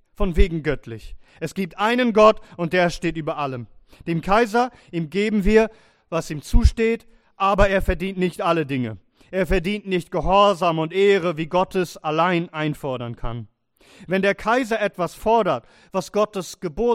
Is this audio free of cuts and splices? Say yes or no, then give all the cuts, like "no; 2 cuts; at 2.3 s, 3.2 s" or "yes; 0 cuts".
yes; 0 cuts